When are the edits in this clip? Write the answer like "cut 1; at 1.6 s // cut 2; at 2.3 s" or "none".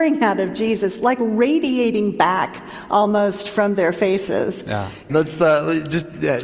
cut 1; at 5.1 s